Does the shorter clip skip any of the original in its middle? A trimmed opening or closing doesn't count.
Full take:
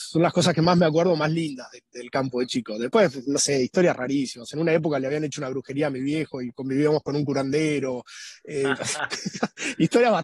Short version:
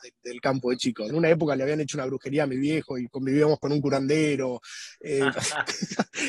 yes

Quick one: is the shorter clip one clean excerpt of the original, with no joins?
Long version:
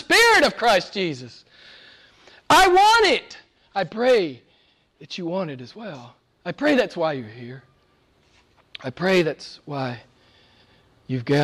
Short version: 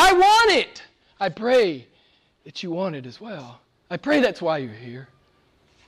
yes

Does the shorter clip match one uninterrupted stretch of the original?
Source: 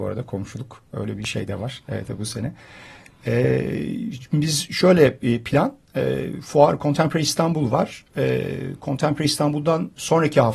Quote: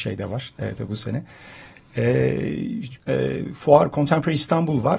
no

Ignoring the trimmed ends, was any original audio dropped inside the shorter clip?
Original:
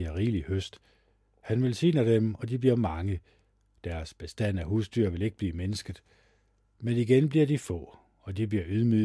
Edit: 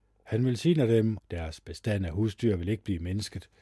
yes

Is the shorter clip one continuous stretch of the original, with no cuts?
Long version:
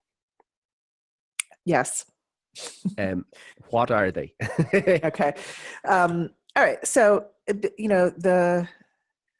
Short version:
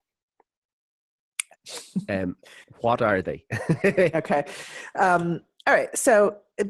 no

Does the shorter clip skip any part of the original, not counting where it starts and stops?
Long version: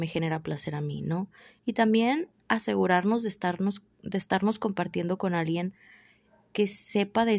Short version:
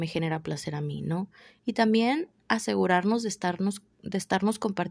no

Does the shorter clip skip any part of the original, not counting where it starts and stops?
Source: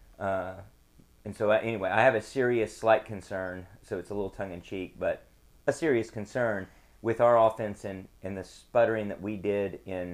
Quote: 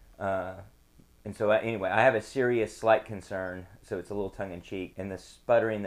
yes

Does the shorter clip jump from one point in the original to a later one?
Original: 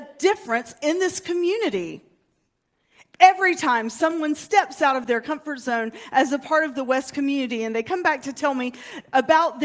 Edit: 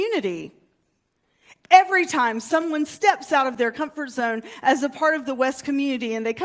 no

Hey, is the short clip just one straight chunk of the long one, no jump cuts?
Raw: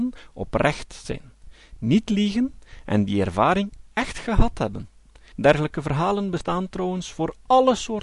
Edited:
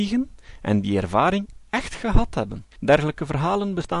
no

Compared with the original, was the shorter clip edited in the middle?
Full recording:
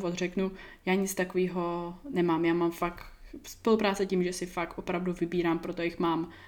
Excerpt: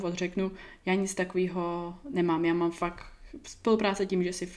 no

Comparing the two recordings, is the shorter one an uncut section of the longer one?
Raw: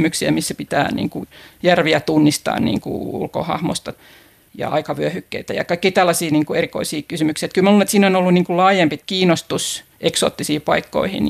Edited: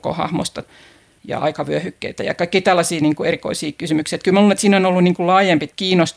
yes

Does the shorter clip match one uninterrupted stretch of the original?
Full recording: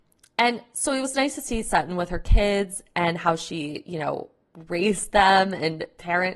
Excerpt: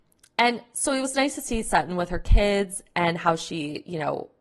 yes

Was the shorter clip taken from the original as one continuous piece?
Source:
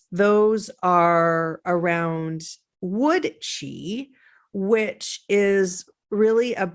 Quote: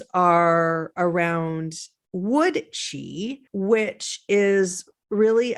no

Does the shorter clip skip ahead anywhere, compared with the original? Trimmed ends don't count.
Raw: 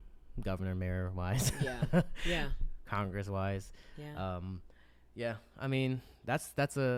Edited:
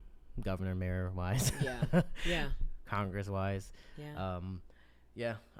no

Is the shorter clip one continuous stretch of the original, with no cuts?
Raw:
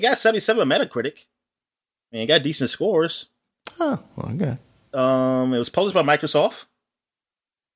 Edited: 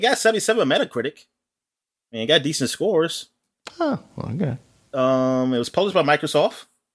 yes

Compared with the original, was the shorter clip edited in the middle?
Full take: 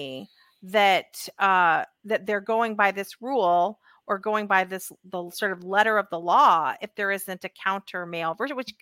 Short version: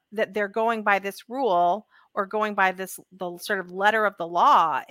no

